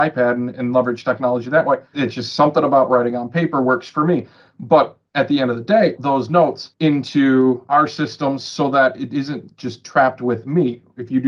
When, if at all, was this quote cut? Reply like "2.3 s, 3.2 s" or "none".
1.9 s, 6.0 s